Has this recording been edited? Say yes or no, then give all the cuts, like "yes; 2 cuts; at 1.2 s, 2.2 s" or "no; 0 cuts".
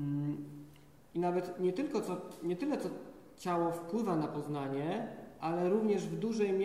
no; 0 cuts